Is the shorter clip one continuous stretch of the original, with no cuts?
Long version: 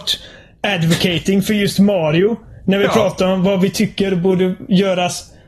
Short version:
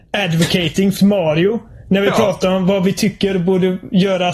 no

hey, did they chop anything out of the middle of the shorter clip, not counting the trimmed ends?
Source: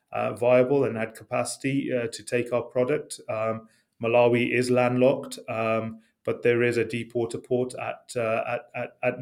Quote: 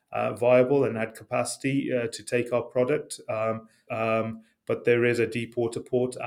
yes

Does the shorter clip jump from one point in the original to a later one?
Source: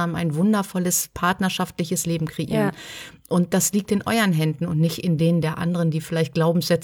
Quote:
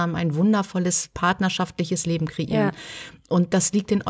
no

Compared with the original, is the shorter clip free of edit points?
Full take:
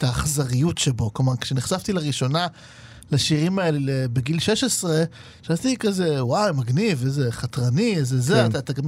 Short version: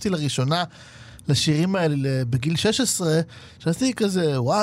yes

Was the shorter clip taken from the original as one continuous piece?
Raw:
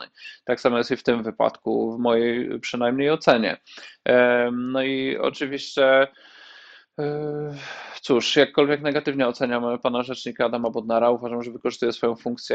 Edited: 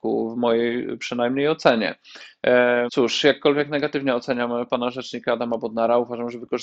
no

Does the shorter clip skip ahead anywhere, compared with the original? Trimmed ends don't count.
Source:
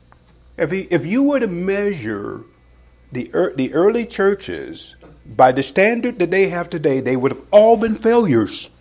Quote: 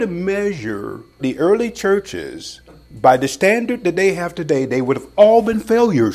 yes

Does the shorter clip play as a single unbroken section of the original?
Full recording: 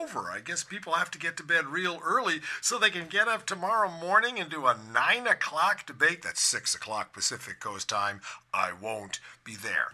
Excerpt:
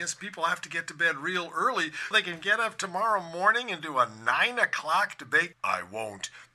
no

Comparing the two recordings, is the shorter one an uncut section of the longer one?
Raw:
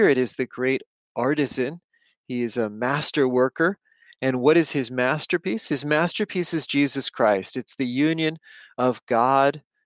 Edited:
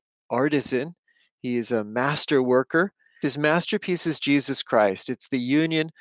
no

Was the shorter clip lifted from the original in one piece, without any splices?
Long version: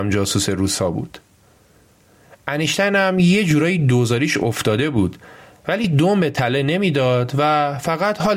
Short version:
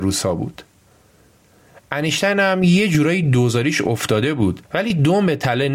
no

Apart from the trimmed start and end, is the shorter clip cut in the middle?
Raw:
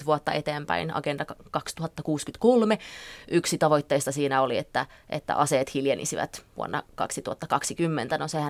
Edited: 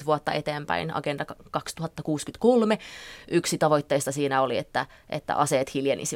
no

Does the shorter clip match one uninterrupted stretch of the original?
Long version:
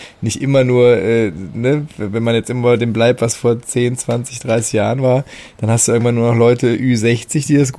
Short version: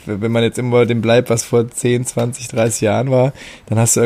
yes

